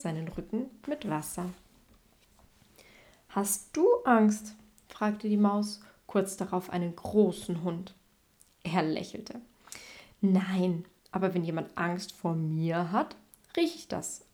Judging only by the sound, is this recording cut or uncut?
uncut